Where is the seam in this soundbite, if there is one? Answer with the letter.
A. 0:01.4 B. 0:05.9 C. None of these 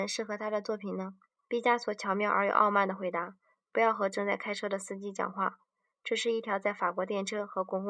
A